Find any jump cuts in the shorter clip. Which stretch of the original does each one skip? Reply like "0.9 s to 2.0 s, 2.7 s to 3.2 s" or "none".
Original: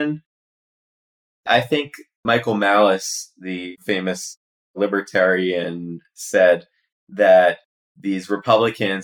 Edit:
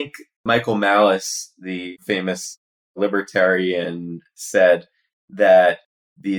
none